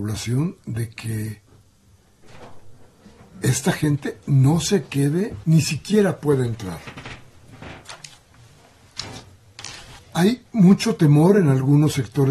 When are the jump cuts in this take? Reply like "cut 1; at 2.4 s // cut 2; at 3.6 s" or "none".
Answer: cut 1; at 5.4 s // cut 2; at 10.0 s